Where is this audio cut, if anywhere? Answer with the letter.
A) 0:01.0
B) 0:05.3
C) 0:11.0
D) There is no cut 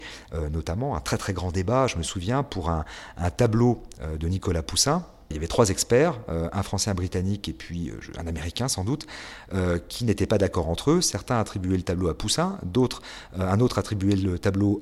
D